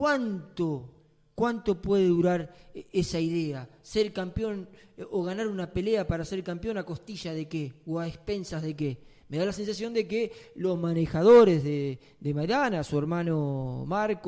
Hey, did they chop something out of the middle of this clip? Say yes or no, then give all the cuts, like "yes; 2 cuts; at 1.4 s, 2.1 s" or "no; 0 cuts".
no; 0 cuts